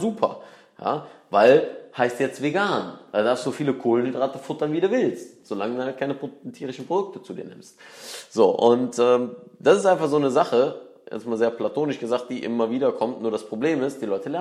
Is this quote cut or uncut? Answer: uncut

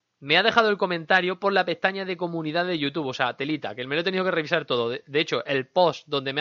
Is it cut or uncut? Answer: uncut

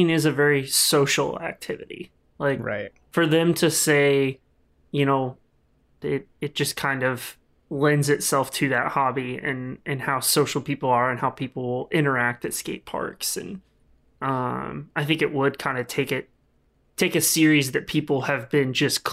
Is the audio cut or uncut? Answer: cut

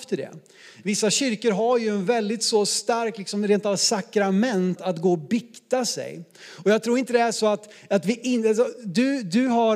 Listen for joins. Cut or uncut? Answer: cut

